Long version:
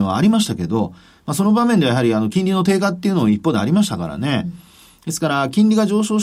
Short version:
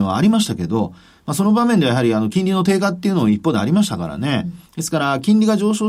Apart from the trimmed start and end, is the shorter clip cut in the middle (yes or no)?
yes